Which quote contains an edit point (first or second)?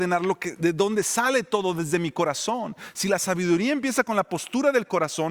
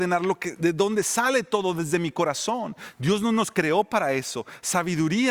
second